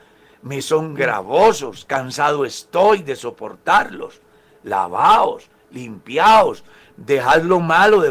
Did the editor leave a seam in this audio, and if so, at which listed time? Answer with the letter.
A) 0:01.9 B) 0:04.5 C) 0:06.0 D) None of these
D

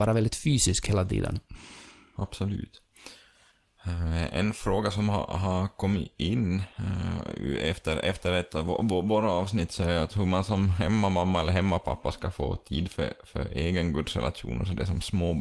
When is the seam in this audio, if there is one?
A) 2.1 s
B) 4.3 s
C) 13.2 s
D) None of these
D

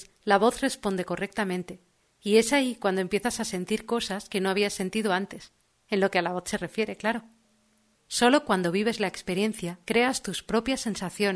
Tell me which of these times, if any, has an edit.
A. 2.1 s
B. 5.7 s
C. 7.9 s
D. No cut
C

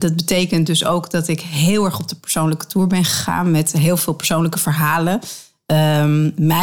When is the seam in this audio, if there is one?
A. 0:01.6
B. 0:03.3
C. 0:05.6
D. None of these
D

